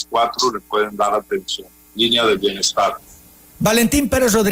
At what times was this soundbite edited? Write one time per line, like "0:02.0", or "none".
none